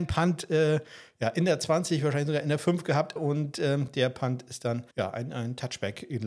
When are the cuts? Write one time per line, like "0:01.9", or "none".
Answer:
0:03.2
0:04.9